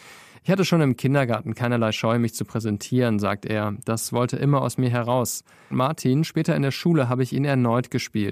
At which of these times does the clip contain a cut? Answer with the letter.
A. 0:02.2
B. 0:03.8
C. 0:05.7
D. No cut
C